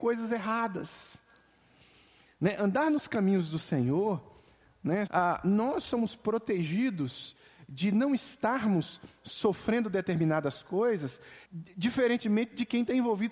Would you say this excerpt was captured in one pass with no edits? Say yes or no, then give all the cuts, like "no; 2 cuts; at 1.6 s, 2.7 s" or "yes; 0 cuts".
no; 2 cuts; at 5.1 s, 11.4 s